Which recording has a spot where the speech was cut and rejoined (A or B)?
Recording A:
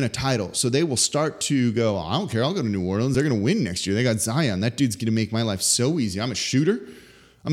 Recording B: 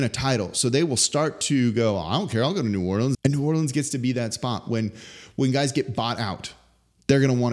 B